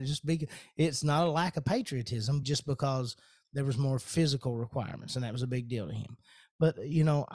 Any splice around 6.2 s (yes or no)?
no